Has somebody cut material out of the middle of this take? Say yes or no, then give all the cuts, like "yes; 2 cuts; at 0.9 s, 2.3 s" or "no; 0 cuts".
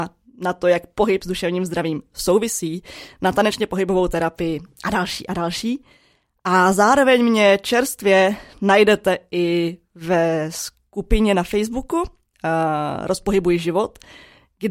no; 0 cuts